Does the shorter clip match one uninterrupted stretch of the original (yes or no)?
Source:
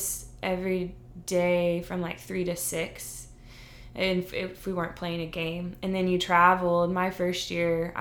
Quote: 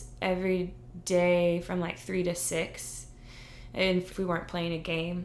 no